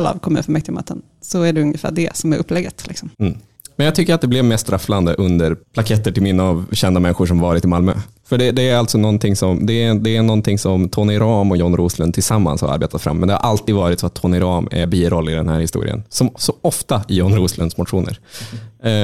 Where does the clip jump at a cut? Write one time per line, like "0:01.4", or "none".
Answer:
0:03.1